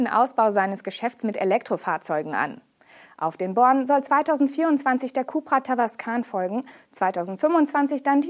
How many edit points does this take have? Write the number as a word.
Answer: one